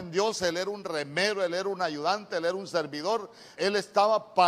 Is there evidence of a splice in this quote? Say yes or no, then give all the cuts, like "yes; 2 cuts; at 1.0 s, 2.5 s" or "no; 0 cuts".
yes; 1 cut; at 3.6 s